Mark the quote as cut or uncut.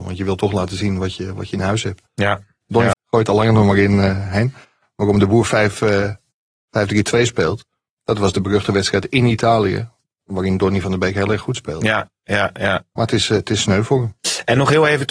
cut